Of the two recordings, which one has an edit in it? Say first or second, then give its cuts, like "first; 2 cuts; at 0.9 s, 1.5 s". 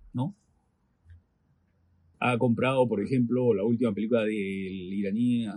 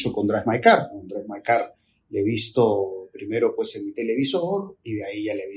first; 1 cut; at 2.1 s